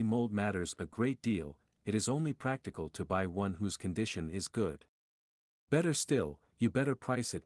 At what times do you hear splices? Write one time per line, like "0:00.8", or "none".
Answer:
0:06.5